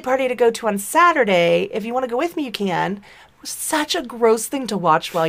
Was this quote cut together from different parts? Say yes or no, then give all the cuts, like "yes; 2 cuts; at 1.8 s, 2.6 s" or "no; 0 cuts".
yes; 1 cut; at 3.3 s